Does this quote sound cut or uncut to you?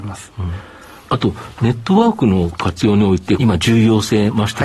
cut